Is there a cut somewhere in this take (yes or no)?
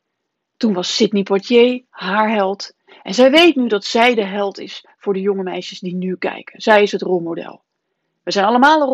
no